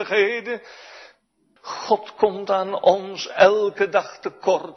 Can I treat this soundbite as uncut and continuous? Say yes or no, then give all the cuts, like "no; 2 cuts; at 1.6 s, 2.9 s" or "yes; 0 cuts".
no; 1 cut; at 1.6 s